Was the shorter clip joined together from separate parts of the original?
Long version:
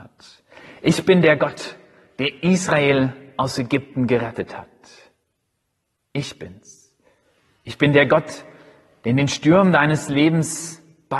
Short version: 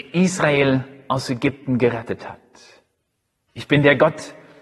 yes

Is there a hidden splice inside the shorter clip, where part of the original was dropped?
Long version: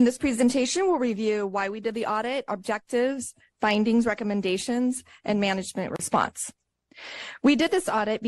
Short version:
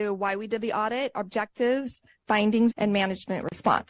yes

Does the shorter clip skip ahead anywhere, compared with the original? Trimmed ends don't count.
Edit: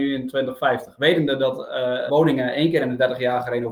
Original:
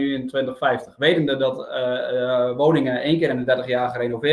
yes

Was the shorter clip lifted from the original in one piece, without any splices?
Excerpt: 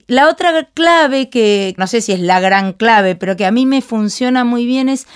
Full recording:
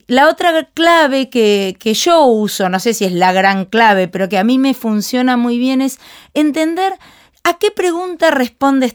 no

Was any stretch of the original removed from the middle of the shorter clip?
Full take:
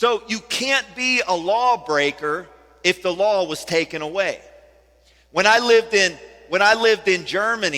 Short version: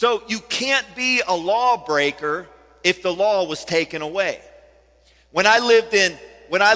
no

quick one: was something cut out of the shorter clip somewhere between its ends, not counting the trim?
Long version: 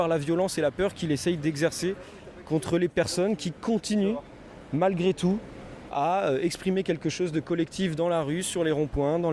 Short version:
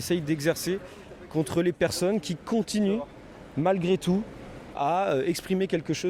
no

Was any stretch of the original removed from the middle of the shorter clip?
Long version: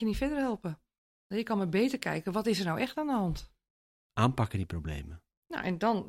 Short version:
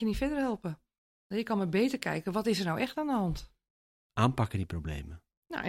no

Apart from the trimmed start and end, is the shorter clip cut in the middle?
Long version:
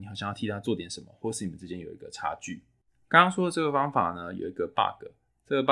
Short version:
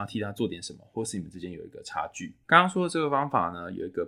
yes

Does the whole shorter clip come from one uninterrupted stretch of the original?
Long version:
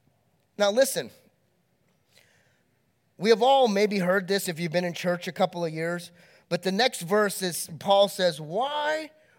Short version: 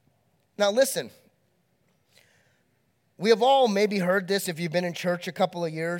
yes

